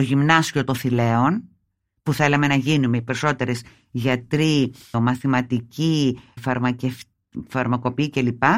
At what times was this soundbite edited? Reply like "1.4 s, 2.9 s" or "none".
4.9 s, 6.4 s